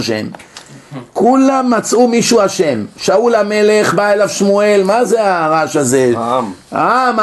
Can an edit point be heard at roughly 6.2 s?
no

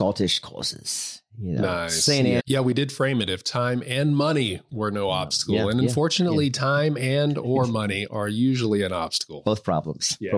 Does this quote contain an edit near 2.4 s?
yes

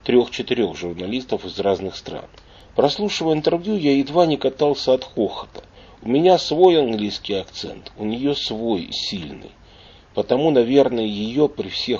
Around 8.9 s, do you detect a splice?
yes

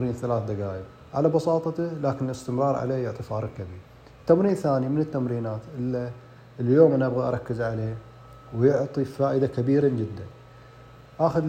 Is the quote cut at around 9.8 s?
yes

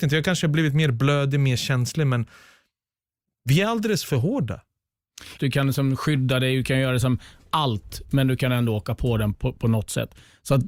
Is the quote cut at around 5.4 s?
yes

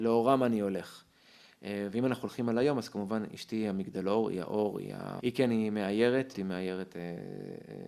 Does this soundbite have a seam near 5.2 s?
yes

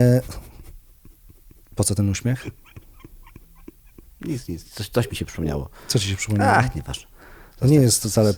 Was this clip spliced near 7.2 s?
no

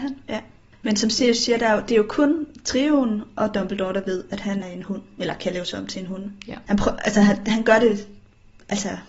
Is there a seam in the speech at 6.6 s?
yes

